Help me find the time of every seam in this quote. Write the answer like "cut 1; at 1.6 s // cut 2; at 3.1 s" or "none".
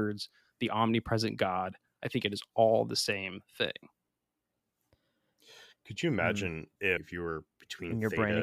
cut 1; at 7.0 s